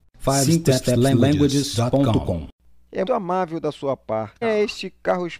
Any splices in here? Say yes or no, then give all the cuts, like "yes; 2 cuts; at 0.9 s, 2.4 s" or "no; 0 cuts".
yes; 2 cuts; at 3.1 s, 4.4 s